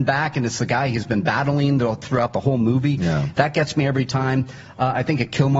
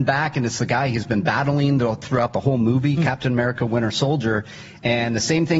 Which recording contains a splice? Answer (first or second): second